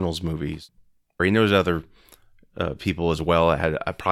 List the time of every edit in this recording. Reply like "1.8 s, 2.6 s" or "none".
1.2 s